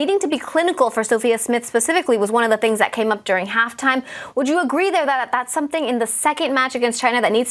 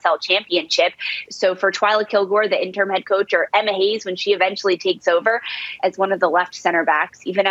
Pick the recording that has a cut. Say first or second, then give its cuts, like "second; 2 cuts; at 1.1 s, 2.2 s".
second; 2 cuts; at 1.3 s, 5.8 s